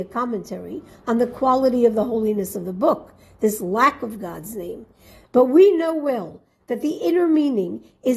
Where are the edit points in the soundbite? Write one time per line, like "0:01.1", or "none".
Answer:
0:05.2